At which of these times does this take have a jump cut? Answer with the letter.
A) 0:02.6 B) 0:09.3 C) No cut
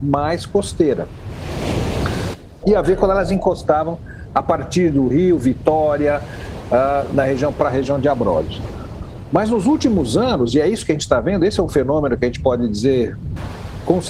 A